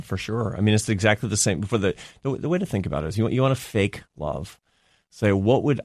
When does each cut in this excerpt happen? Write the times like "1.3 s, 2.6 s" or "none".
none